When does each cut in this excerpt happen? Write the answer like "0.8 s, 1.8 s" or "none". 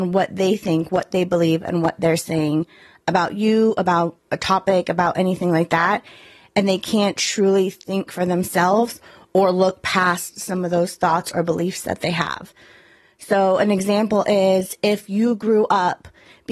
none